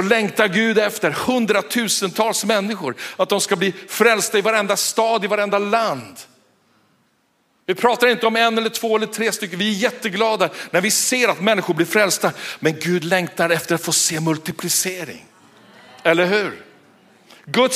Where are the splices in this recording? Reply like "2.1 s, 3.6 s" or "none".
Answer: none